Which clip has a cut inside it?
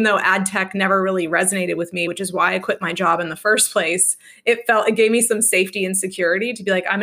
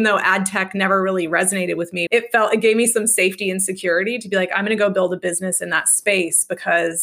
second; 1 cut; at 2.1 s

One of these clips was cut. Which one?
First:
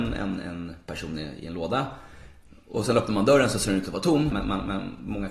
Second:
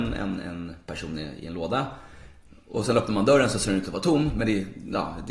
first; 1 cut; at 4.3 s

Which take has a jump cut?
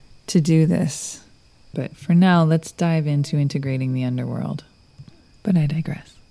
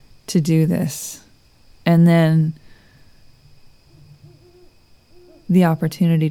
first; 2 cuts; at 1.7 s, 5.3 s

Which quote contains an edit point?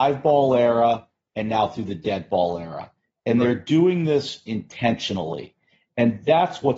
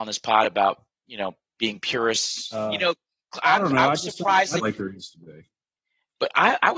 second; 2 cuts; at 2.5 s, 4.6 s

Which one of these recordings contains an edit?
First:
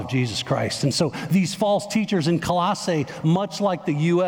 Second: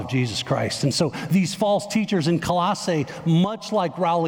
first; 1 cut; at 3.2 s

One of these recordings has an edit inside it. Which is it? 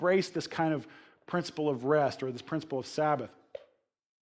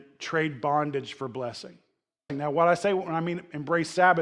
second; 1 cut; at 2.3 s

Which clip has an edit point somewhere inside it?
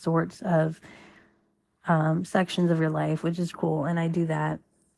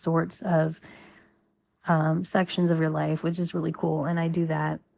first; 1 cut; at 3.5 s

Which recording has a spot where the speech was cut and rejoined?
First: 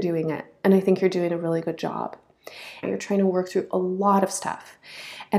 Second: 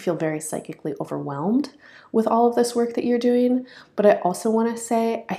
first; 1 cut; at 2.8 s

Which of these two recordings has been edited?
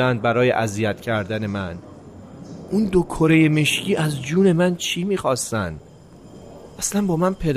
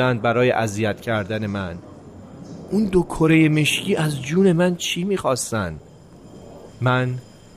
second; 1 cut; at 6.7 s

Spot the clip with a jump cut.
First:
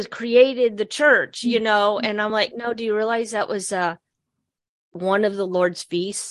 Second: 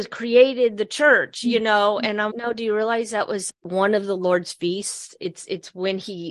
second; 2 cuts; at 2.3 s, 3.5 s

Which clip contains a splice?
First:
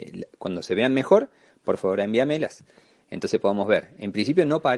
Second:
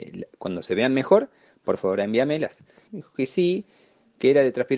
second; 1 cut; at 2.9 s

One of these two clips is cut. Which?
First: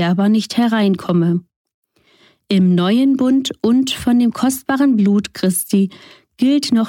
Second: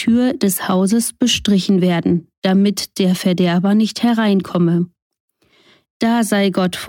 second; 1 cut; at 5.8 s

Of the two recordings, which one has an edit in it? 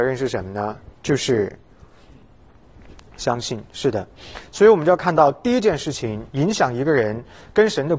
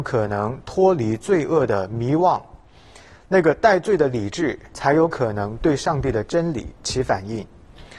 first; 1 cut; at 0.9 s

